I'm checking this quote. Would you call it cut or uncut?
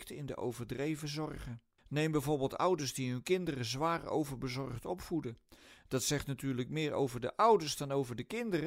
cut